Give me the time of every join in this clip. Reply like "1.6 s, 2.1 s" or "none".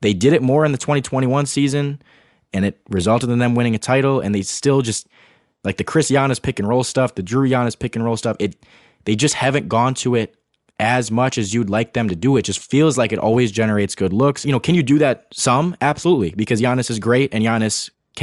14.4 s

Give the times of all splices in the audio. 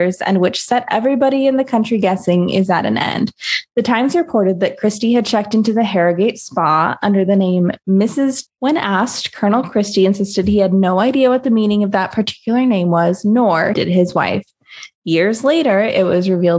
3.7 s, 8.5 s, 13.7 s

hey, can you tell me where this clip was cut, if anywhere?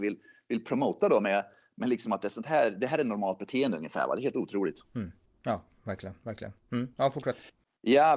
none

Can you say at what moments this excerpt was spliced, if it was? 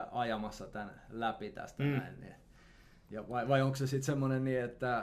none

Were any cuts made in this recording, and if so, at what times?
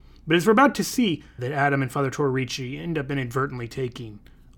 1.4 s

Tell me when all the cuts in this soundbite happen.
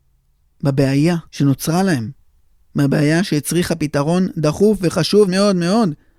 1.3 s, 5.3 s

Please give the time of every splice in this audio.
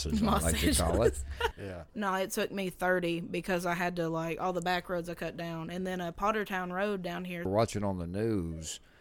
1.5 s, 7.5 s

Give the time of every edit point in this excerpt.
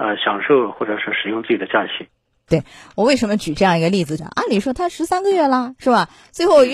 4.2 s

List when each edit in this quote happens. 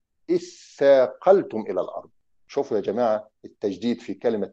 2.3 s

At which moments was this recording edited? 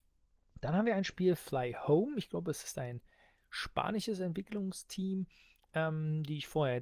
none

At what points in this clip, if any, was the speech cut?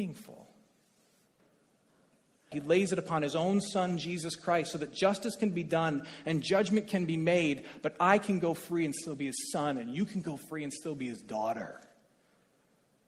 2.5 s

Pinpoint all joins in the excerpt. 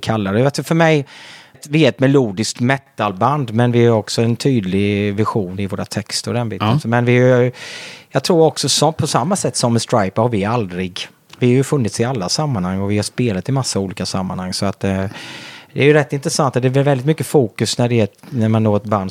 1.5 s

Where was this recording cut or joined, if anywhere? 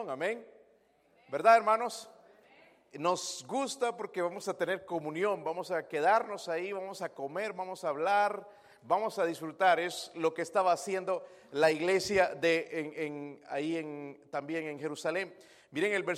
none

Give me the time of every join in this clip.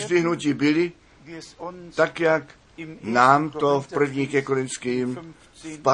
none

